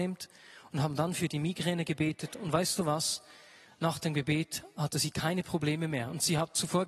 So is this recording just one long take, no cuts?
yes; 0 cuts

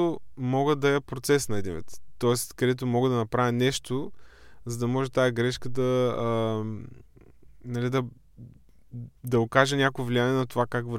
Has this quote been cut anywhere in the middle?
no; 0 cuts

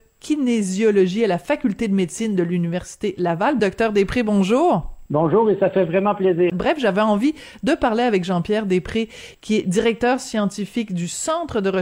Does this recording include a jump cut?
yes; 2 cuts; at 3.6 s, 6.5 s

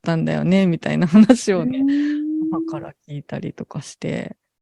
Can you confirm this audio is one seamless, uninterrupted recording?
yes; 0 cuts

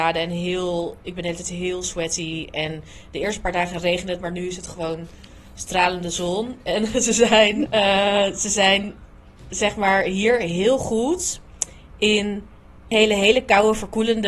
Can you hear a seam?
yes; 2 cuts; at 7.7 s, 12.9 s

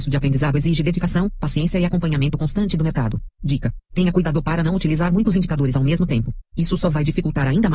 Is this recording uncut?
no; 1 cut; at 3.8 s

